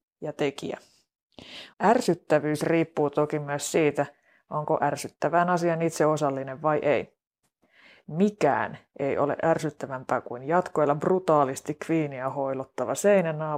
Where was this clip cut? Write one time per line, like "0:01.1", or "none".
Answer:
0:01.7